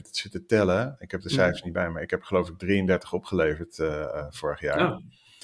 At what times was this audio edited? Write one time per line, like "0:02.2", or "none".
none